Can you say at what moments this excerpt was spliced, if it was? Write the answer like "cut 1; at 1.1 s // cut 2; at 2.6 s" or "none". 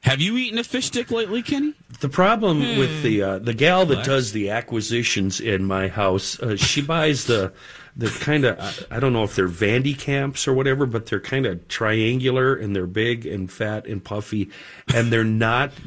none